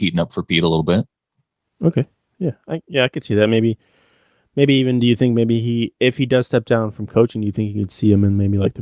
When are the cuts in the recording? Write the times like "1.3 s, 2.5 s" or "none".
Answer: none